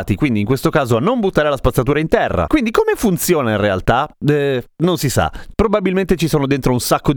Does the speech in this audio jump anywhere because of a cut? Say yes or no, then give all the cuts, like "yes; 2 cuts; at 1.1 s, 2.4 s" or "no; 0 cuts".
yes; 1 cut; at 5.5 s